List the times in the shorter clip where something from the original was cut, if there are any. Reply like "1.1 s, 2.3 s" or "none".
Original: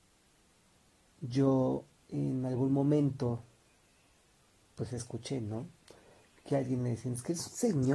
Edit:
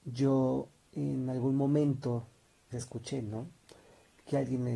2.7 s